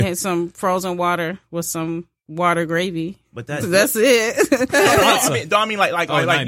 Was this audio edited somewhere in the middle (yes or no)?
yes